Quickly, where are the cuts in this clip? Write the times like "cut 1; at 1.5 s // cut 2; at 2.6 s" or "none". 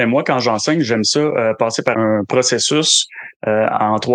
cut 1; at 1.9 s